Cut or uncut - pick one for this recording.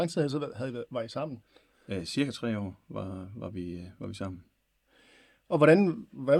uncut